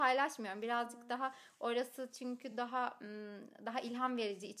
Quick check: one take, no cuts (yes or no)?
yes